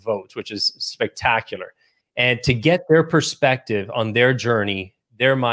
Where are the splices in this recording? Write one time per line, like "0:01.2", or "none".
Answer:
0:02.0